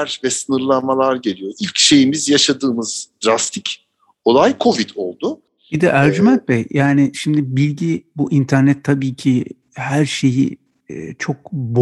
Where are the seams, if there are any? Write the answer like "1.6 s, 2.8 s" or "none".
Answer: none